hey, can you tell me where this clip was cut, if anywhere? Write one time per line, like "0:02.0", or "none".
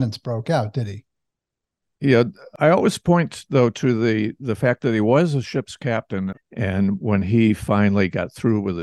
0:06.3